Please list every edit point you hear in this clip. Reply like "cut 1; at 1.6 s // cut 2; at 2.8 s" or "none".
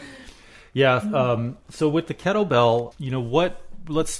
cut 1; at 2.9 s